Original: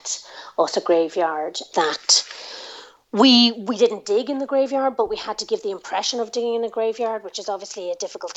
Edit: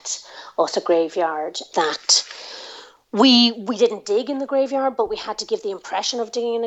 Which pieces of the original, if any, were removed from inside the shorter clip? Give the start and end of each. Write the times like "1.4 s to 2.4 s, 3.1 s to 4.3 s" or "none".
none